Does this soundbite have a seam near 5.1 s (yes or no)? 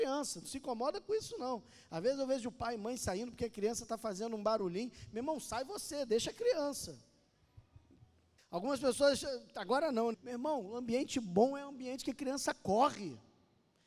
no